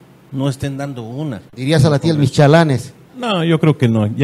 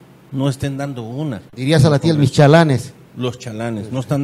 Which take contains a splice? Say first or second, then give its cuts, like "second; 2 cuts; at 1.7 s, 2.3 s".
first; 1 cut; at 3.1 s